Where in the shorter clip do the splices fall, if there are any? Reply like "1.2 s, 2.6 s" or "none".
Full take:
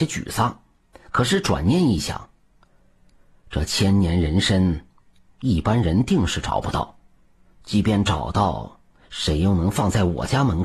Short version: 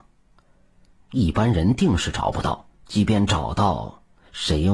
0.9 s, 2.7 s